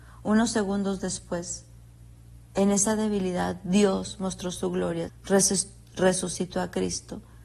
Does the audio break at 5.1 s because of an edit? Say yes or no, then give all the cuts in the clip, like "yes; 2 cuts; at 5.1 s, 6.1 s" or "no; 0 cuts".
yes; 1 cut; at 5.1 s